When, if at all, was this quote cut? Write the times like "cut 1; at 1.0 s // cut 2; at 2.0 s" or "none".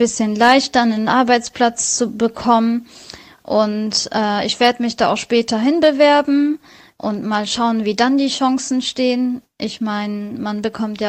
none

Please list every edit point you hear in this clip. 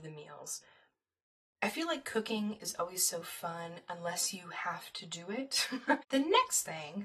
cut 1; at 6.0 s

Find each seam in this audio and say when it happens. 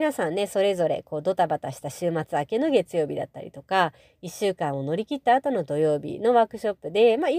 none

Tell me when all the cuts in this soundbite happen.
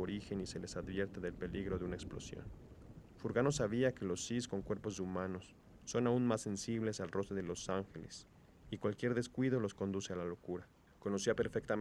none

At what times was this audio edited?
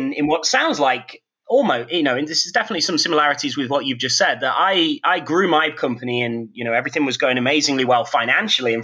none

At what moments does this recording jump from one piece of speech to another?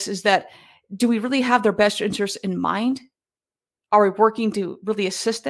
none

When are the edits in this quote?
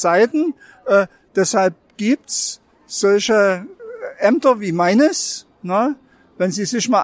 cut 1; at 1.3 s

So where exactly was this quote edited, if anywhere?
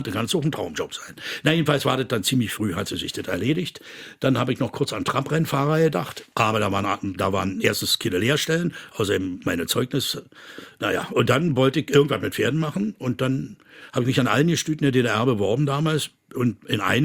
none

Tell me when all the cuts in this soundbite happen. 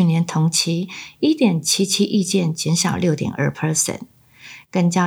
none

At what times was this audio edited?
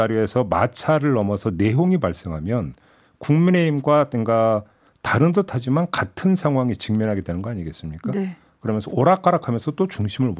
none

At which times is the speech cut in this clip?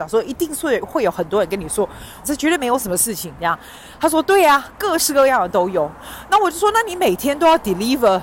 cut 1; at 2.2 s

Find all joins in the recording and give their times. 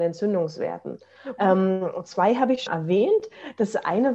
cut 1; at 1.4 s // cut 2; at 2.7 s

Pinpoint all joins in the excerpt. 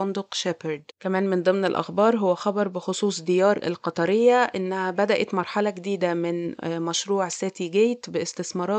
cut 1; at 0.9 s

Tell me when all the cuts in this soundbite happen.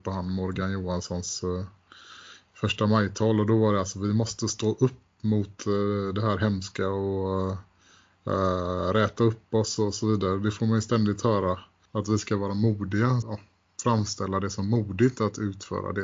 cut 1; at 13.2 s

